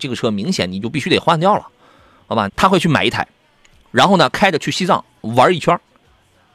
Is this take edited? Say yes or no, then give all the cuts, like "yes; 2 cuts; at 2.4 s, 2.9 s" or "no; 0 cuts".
yes; 1 cut; at 2.5 s